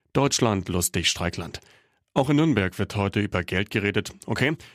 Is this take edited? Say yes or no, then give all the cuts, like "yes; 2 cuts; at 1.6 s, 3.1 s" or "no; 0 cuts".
no; 0 cuts